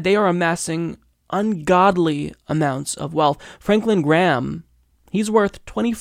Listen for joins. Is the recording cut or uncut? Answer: uncut